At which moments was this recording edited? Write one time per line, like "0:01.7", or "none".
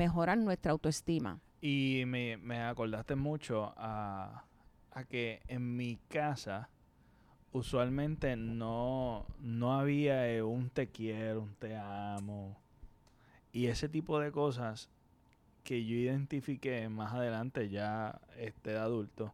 none